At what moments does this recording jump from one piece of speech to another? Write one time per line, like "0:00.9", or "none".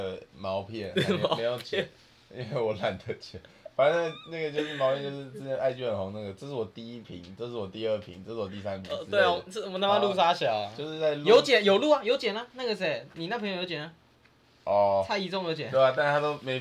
none